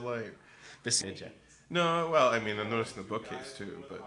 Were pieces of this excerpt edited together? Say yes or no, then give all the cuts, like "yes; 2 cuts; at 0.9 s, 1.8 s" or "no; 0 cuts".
yes; 1 cut; at 1.0 s